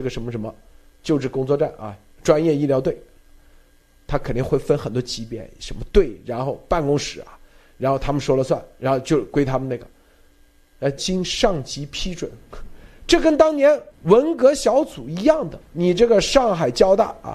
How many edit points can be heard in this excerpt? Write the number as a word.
three